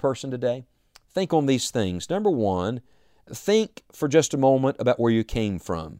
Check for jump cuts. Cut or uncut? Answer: uncut